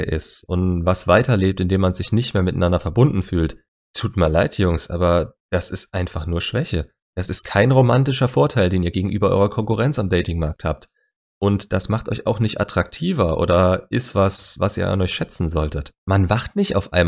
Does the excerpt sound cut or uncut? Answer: cut